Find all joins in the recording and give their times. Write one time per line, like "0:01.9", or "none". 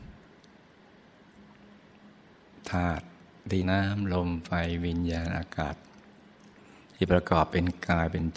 0:03.6